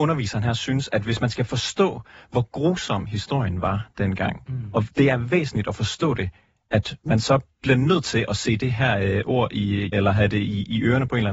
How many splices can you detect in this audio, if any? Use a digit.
1